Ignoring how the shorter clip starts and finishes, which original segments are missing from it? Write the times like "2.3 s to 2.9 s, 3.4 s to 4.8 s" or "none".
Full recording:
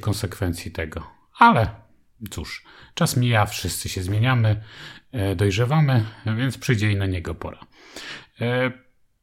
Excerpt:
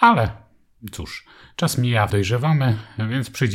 3.5 s to 5.4 s